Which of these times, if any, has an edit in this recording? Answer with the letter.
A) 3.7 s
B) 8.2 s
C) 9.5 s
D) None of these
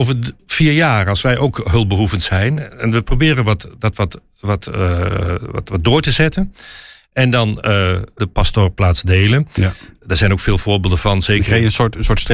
B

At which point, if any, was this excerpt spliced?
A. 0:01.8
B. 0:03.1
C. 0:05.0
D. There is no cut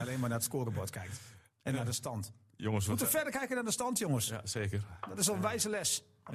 D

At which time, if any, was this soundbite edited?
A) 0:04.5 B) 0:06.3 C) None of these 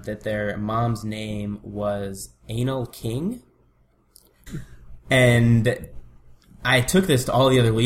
A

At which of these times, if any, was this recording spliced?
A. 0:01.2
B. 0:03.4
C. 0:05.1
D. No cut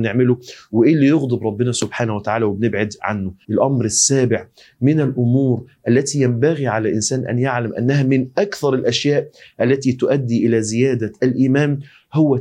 B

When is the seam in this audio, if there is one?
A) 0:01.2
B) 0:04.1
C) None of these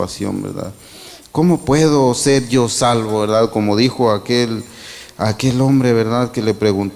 A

